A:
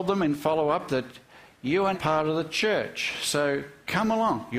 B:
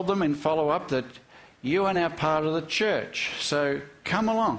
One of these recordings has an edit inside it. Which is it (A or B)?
A